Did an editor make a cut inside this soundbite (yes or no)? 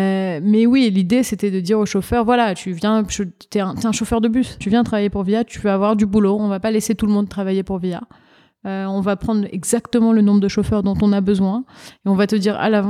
yes